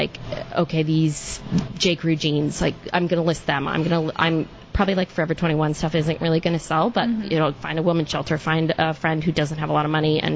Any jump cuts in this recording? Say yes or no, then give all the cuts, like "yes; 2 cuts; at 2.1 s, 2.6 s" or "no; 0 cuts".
no; 0 cuts